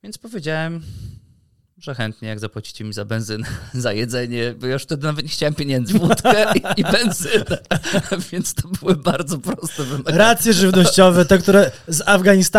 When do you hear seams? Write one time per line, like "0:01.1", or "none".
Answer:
0:05.9